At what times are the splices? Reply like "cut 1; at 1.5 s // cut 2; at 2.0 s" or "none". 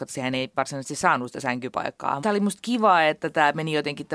cut 1; at 2.2 s